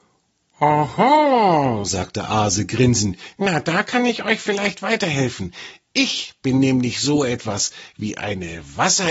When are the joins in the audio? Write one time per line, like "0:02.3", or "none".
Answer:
none